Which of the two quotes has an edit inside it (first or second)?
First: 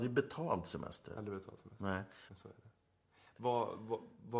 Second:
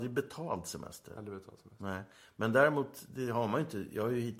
first